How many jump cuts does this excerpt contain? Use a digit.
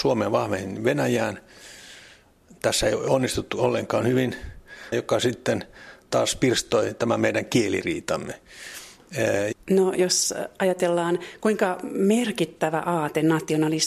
2